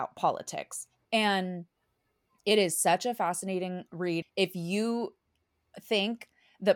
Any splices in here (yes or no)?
yes